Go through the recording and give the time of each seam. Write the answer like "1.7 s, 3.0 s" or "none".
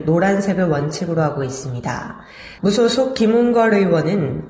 2.6 s